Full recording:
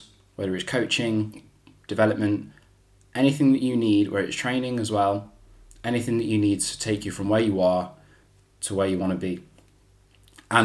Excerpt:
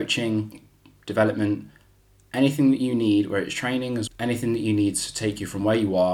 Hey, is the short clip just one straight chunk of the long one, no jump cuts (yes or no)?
no